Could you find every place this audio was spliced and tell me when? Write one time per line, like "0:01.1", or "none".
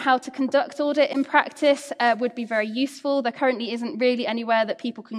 none